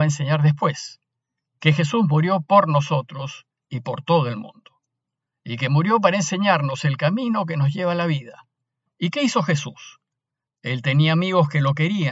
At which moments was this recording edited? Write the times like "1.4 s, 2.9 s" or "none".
8.9 s